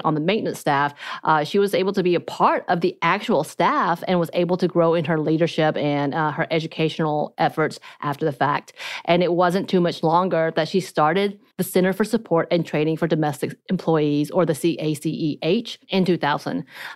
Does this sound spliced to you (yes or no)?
yes